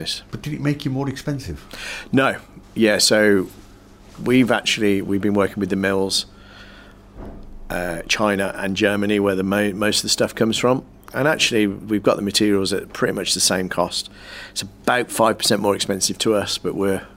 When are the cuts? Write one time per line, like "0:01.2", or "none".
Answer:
0:02.6